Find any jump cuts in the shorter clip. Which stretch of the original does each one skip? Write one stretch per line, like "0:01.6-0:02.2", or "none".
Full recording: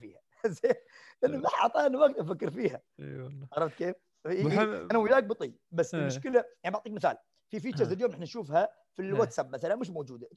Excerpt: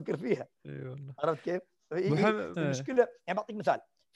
0:04.9-0:05.9